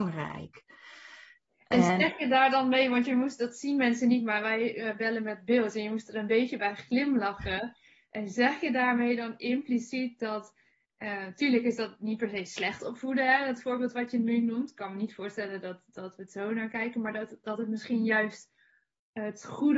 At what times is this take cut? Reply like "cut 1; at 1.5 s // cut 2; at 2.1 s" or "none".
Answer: none